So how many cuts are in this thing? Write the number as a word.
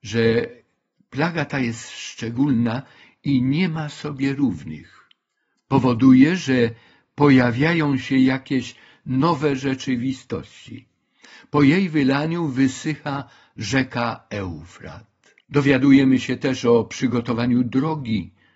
one